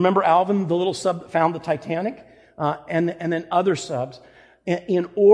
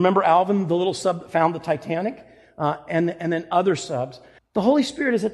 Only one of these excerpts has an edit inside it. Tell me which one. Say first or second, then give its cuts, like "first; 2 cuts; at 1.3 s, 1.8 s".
second; 1 cut; at 4.4 s